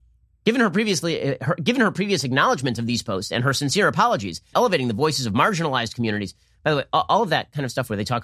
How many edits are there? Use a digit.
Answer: 1